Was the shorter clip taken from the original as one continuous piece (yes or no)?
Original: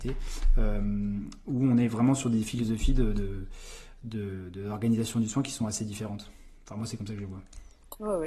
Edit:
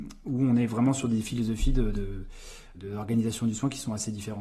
no